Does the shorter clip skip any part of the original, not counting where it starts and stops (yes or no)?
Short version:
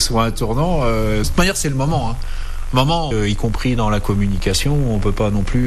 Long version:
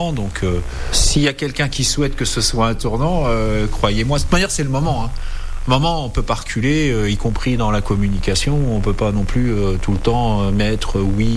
yes